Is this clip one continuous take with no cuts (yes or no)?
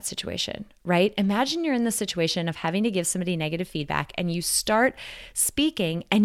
yes